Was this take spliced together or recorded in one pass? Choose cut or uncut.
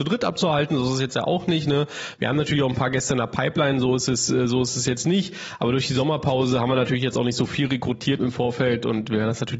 cut